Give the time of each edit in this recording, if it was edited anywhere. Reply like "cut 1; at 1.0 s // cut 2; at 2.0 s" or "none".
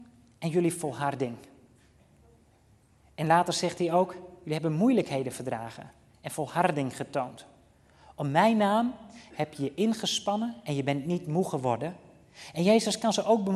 none